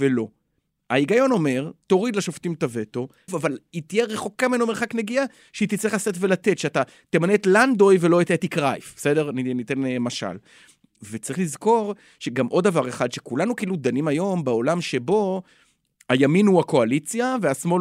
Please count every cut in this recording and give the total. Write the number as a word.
one